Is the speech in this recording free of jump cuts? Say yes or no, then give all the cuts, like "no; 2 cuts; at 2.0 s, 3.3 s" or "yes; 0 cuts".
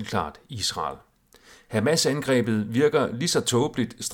yes; 0 cuts